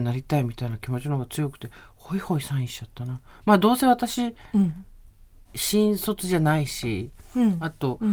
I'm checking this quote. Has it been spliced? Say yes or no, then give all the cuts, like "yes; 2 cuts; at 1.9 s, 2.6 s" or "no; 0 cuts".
no; 0 cuts